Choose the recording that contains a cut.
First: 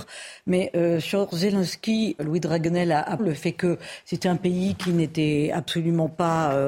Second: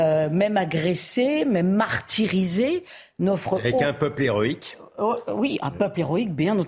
first; 2 cuts; at 2.2 s, 3.2 s

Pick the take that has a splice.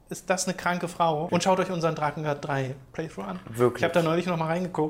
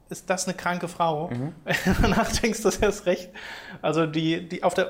first; 1 cut; at 1.3 s

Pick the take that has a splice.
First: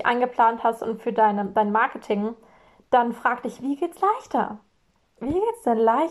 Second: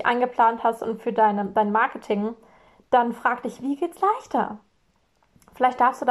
first; 1 cut; at 5.2 s

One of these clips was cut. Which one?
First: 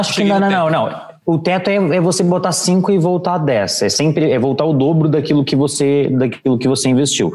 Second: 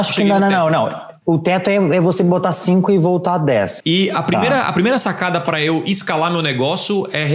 second; 1 cut; at 3.8 s

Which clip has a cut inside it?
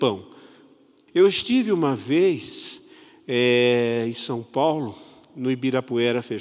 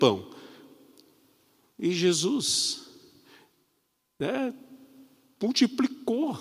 first; 1 cut; at 1.1 s

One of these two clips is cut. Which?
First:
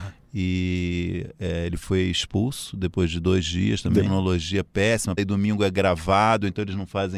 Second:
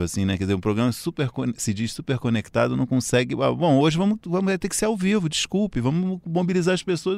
first; 2 cuts; at 4.1 s, 5.2 s

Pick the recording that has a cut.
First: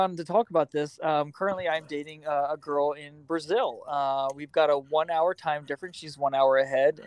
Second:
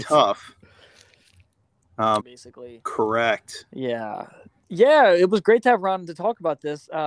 second; 2 cuts; at 2.2 s, 4.6 s

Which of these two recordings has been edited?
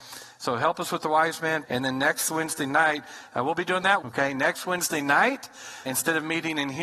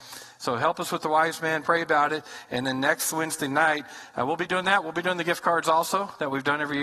first; 3 cuts; at 1.6 s, 4.0 s, 5.9 s

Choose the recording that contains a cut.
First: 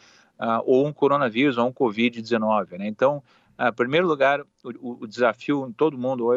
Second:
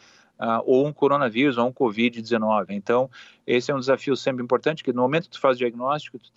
second; 1 cut; at 2.7 s

